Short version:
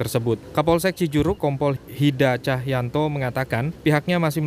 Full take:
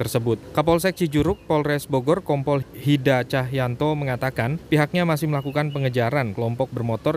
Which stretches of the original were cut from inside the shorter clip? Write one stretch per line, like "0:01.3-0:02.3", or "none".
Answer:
0:01.4-0:02.2